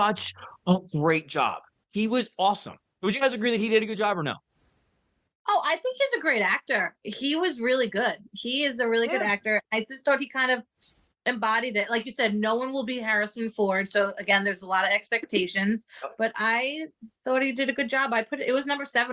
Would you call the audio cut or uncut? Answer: uncut